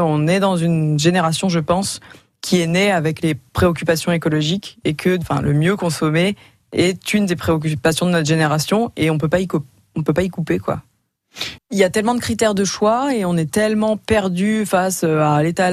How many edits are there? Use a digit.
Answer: 1